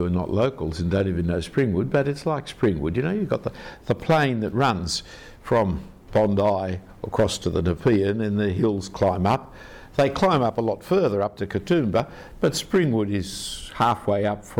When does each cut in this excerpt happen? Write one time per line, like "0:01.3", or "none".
none